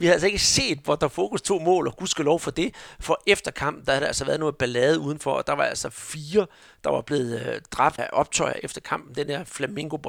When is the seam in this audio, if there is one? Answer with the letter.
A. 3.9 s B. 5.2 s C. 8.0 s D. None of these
C